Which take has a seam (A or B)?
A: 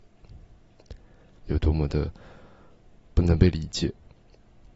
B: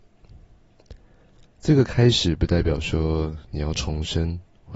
A